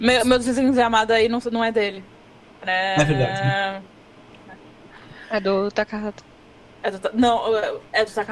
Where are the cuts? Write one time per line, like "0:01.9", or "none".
none